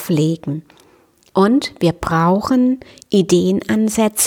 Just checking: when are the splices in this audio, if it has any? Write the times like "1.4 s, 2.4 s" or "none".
1.3 s